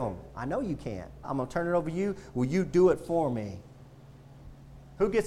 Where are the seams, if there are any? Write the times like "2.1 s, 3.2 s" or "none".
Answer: 1.2 s